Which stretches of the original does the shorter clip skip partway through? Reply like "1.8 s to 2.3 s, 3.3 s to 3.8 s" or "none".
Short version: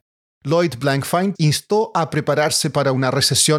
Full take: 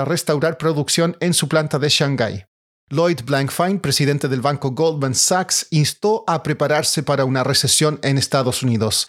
3.8 s to 5.7 s